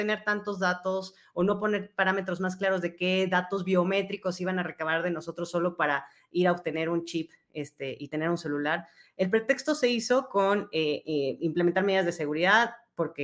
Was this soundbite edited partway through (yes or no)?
no